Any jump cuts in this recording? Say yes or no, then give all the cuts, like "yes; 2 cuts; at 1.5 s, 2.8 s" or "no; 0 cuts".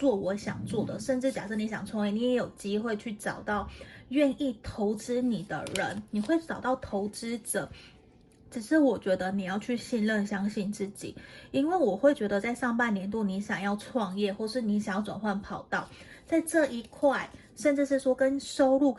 no; 0 cuts